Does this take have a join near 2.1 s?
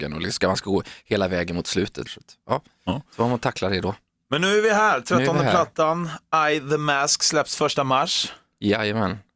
yes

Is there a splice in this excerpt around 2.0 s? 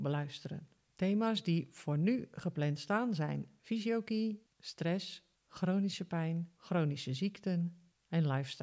no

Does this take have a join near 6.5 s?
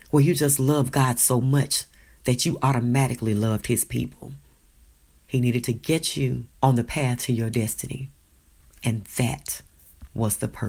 yes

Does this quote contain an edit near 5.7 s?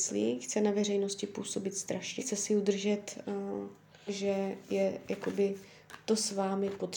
no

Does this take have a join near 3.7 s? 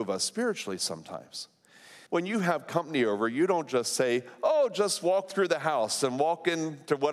no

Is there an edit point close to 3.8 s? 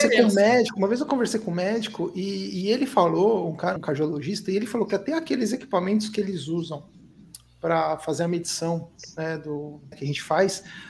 yes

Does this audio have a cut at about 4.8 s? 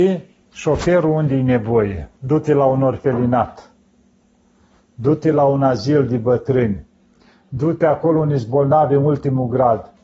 no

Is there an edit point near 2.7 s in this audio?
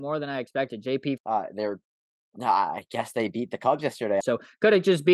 no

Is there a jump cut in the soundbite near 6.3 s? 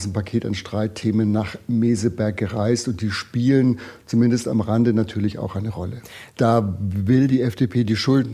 yes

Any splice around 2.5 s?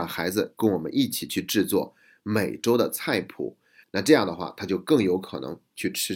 no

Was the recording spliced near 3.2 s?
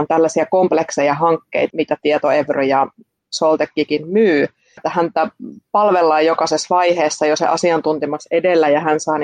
no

